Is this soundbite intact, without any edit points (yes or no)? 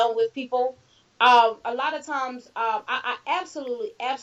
yes